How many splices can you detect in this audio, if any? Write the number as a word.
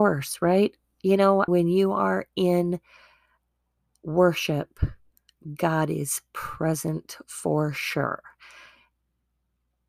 one